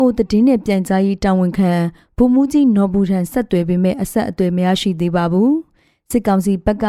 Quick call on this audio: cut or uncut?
uncut